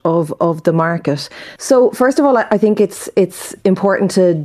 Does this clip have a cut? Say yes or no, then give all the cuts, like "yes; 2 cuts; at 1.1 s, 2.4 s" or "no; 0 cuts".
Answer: yes; 1 cut; at 1.6 s